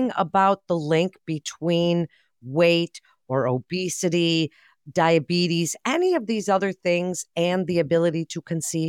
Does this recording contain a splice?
no; 0 cuts

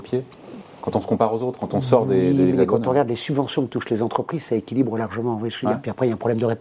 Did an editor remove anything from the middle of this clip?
yes; 1 cut; at 2.5 s

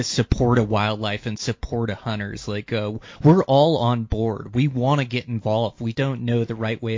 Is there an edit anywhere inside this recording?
yes; 1 cut; at 5.9 s

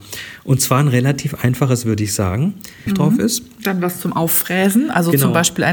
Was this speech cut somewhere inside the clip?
yes; 1 cut; at 2.9 s

